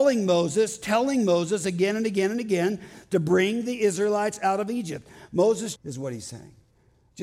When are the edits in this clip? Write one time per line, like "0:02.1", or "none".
0:05.8